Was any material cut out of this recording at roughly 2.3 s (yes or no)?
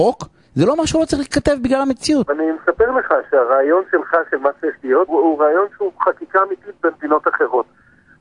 yes